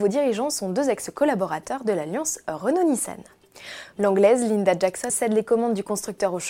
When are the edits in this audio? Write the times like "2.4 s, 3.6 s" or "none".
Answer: 3.9 s, 5.1 s